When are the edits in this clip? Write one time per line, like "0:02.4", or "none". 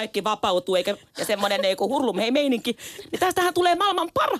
none